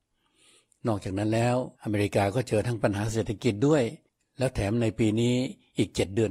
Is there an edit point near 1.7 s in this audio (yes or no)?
yes